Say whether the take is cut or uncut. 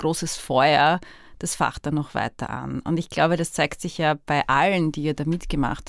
uncut